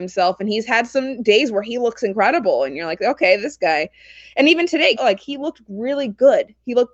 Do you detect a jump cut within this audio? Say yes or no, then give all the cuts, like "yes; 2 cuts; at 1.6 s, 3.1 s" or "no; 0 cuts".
yes; 1 cut; at 5.0 s